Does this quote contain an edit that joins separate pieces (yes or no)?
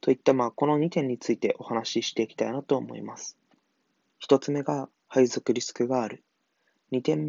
yes